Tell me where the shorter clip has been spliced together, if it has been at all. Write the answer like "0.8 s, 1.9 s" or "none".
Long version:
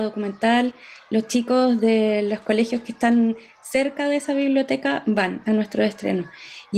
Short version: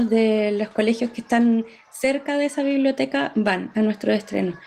none